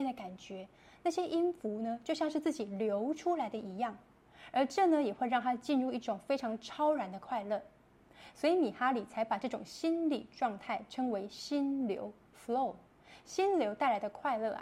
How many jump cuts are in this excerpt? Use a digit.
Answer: 0